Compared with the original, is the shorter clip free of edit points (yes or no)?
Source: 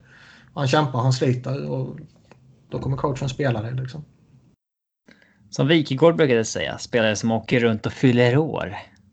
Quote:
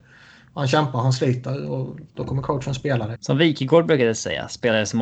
no